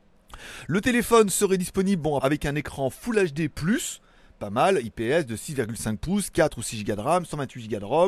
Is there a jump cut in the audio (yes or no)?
yes